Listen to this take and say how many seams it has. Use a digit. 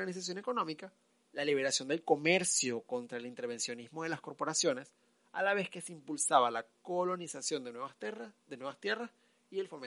1